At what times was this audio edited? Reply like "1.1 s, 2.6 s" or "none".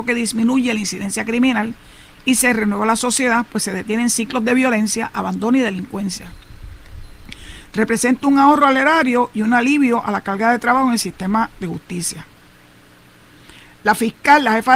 none